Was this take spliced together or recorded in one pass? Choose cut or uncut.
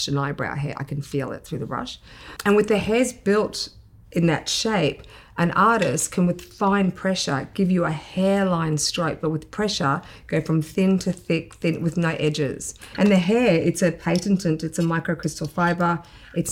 cut